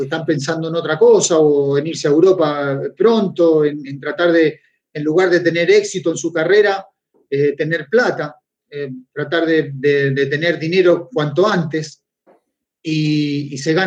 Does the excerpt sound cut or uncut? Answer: uncut